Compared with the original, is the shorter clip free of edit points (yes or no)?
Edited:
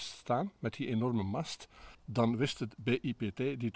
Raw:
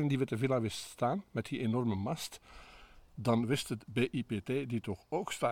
no